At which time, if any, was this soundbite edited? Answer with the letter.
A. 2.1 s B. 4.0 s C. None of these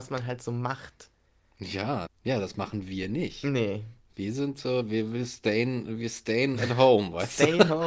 A